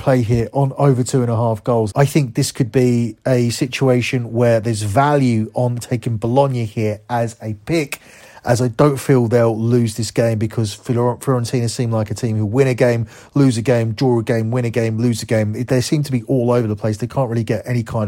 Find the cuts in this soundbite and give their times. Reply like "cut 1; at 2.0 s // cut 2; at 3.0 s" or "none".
cut 1; at 1.9 s